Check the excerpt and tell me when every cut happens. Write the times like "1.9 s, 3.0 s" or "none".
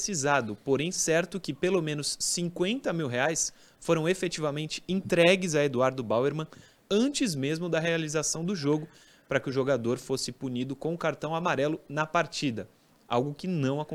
none